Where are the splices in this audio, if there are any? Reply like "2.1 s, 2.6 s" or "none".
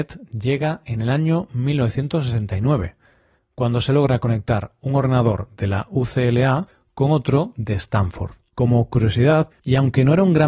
8.5 s, 9.5 s